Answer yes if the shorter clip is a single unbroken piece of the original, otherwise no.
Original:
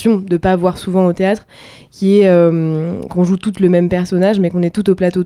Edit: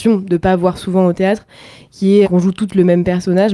no